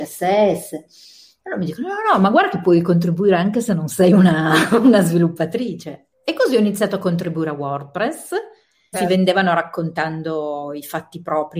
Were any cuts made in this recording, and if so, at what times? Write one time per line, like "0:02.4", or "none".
0:06.1
0:08.9